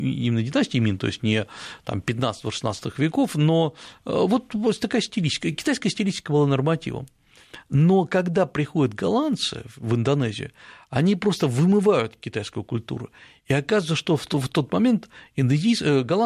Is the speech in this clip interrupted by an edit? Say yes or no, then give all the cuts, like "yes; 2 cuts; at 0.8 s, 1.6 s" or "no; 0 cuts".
no; 0 cuts